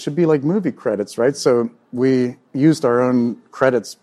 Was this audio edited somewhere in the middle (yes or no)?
no